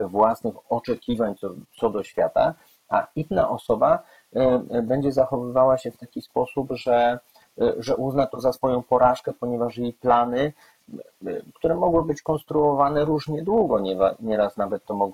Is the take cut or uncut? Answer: uncut